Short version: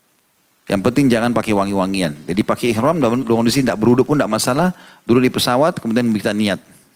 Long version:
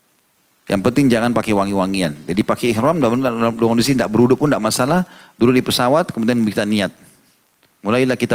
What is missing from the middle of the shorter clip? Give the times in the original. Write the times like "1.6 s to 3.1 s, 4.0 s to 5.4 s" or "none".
3.2 s to 3.5 s